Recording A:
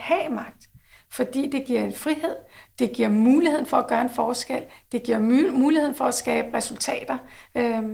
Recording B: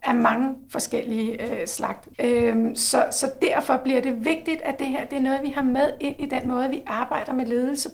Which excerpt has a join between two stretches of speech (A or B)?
B